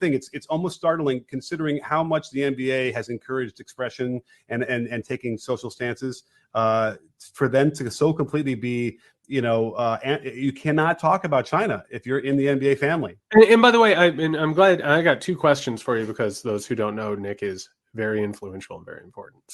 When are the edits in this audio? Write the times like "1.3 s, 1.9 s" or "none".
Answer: 13.2 s